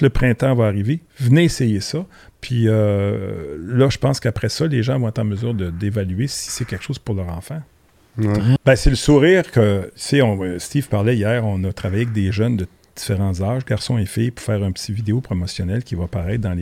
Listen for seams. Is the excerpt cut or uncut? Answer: cut